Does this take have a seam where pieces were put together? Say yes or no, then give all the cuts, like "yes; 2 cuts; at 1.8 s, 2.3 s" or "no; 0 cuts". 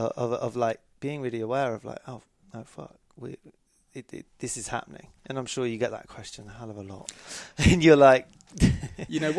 no; 0 cuts